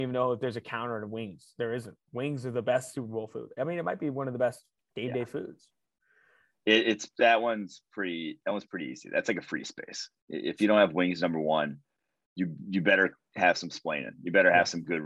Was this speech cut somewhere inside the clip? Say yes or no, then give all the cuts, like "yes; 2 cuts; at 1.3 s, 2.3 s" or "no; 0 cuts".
no; 0 cuts